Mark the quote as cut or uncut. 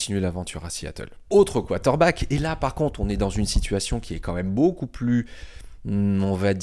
cut